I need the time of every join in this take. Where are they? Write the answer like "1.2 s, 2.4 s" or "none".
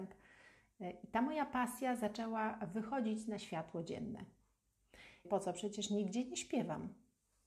5.2 s